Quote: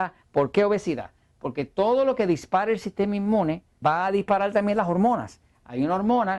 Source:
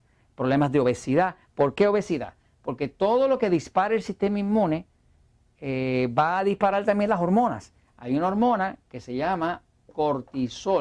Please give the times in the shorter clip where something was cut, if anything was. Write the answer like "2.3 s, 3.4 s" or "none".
3.8 s